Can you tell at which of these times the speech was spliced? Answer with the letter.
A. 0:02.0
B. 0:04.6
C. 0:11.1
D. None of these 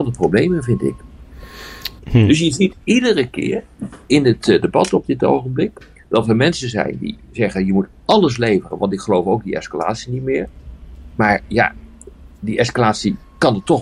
A